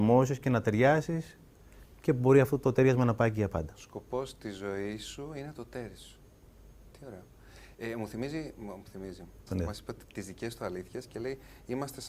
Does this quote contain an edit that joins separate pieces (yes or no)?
yes